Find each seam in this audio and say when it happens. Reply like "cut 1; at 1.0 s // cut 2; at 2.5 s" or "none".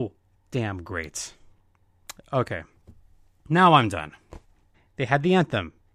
cut 1; at 4.7 s